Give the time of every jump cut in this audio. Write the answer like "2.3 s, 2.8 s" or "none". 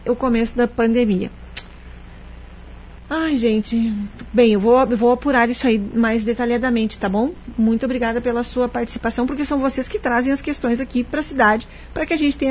none